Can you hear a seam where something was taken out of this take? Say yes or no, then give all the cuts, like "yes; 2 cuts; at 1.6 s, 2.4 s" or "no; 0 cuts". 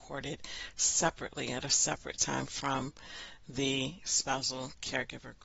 no; 0 cuts